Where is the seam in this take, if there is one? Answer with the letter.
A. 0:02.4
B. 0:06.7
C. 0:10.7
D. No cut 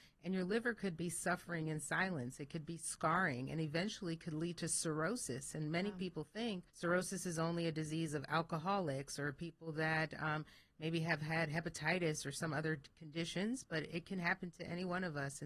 B